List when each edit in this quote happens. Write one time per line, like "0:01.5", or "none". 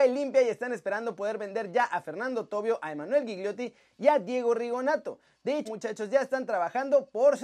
0:05.6